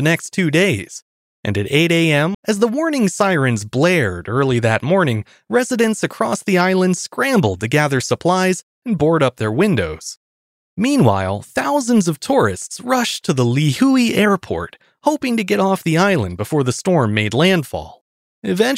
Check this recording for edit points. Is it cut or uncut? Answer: cut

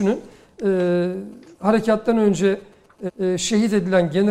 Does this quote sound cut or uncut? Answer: cut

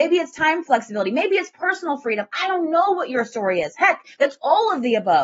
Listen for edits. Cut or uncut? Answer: cut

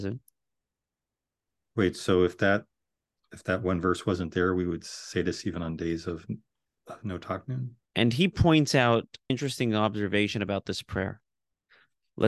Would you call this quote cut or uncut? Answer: cut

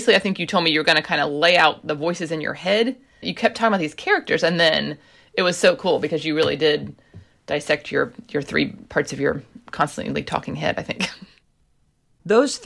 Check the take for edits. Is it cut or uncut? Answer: uncut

